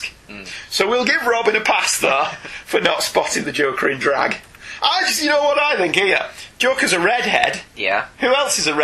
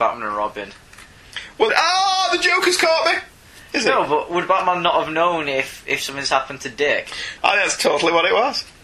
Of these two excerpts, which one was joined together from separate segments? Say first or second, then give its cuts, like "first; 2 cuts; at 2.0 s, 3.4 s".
second; 2 cuts; at 1.7 s, 7.4 s